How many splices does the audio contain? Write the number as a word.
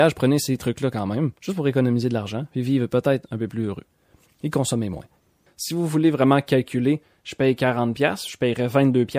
one